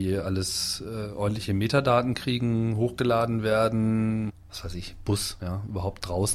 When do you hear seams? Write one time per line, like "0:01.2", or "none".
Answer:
0:04.3
0:05.4